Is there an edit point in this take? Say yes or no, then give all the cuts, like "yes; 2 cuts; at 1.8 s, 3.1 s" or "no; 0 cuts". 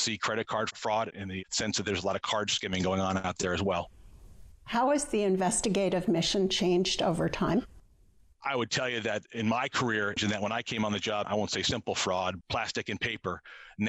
yes; 3 cuts; at 10.2 s, 11.2 s, 12.4 s